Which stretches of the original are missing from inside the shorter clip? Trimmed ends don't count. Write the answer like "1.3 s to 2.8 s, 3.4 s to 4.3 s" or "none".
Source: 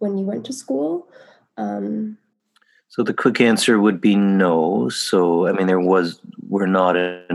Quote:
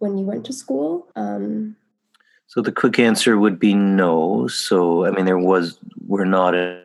1.1 s to 1.5 s

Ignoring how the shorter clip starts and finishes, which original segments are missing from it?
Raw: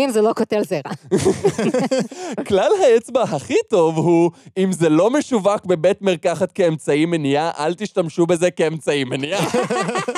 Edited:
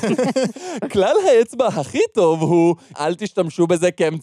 4.5 s to 7.5 s

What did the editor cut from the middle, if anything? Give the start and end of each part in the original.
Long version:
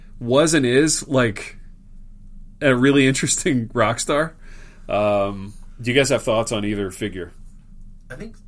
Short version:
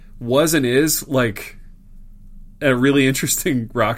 none

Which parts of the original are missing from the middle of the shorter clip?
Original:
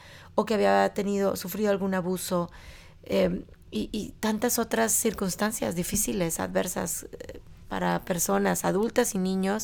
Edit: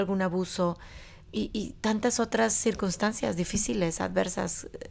2.9 s to 3.6 s

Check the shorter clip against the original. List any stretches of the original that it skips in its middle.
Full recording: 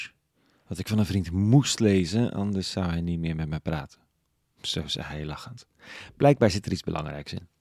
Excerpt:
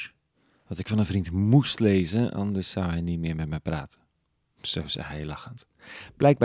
none

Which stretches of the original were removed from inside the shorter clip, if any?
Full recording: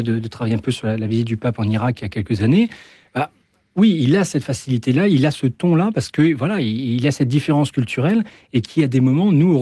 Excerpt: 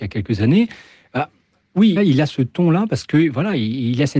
4.0 s to 5.0 s

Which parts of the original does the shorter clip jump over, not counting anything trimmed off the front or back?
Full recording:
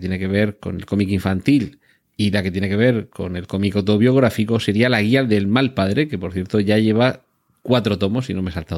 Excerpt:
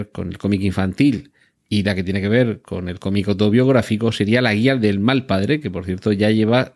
none

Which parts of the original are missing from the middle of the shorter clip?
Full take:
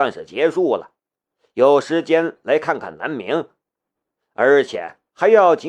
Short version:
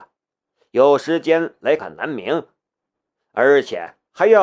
2.6 s to 2.8 s

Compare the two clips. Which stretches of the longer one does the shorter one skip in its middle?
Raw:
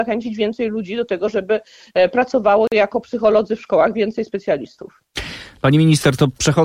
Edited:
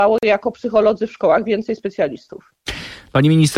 none

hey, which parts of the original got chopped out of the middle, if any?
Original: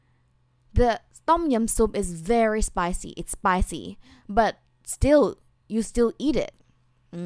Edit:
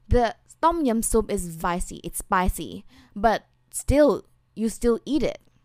2.3 s to 2.7 s

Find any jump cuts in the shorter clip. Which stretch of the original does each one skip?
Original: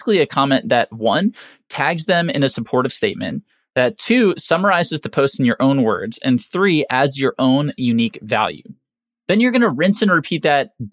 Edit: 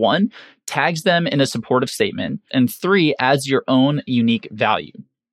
3.5 s to 6.2 s

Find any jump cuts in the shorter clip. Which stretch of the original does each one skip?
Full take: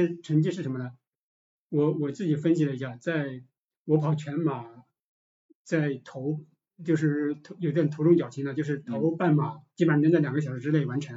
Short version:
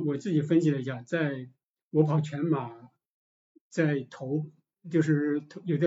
none

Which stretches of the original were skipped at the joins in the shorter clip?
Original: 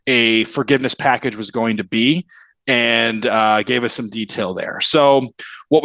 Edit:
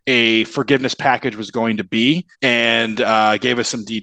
2.3 s to 2.6 s

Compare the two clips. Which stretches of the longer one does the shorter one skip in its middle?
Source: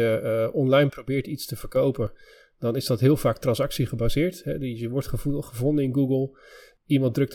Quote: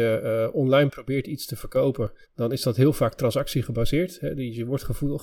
2.2 s to 2.5 s

